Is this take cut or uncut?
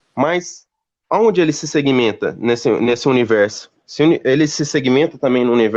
uncut